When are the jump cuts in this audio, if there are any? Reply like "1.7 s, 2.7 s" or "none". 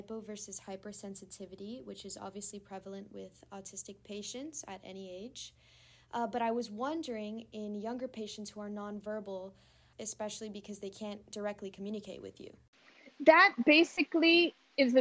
9.9 s